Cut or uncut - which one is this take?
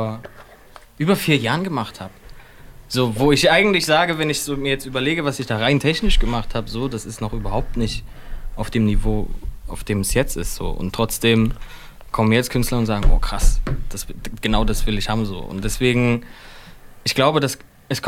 uncut